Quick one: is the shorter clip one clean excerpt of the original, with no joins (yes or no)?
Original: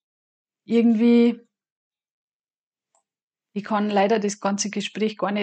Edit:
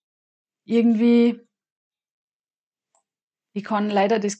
yes